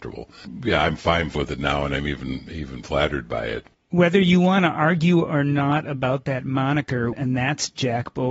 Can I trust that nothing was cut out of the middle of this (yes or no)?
no